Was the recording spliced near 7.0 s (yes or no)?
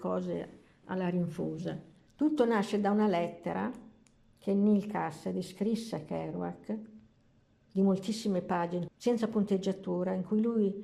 no